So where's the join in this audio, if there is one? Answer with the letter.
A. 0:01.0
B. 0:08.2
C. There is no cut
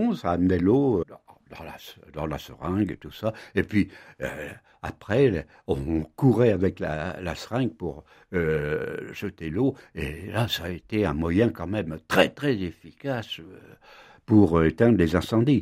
A